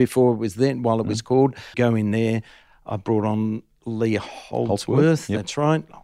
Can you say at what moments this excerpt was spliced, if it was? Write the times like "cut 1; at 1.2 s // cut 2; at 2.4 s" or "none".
cut 1; at 1.7 s